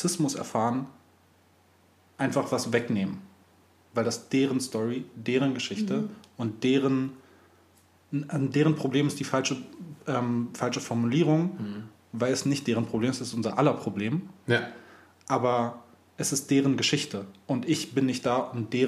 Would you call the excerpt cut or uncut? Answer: uncut